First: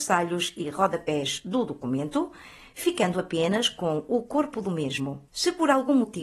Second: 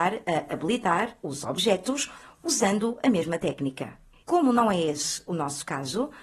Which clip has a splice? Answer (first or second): second